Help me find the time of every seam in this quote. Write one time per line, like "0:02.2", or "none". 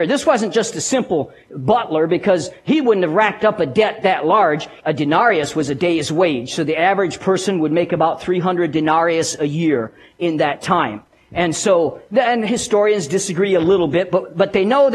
0:04.8